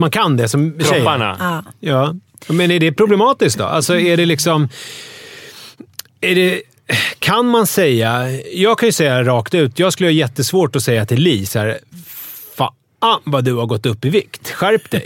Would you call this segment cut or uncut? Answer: uncut